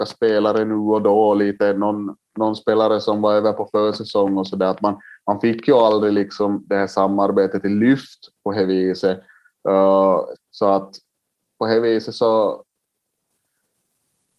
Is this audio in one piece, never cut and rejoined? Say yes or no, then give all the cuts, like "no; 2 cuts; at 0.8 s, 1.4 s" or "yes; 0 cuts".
no; 1 cut; at 10.3 s